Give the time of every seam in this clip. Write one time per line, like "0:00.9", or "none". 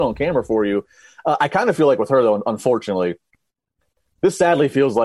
none